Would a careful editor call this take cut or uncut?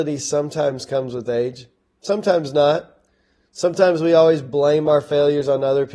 uncut